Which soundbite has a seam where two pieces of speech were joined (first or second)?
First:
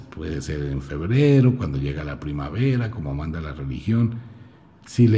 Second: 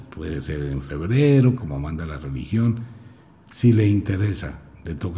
second